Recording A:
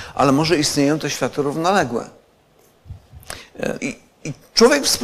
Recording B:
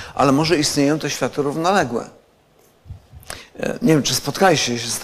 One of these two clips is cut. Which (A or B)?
A